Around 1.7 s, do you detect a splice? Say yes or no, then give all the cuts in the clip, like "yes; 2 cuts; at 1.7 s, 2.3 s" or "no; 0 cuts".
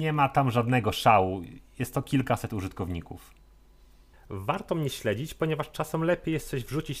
no; 1 cut; at 4.1 s